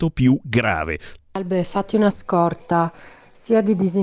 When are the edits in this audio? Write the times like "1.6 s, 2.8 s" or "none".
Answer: 1.2 s